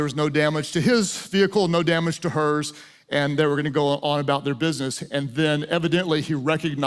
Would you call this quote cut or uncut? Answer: uncut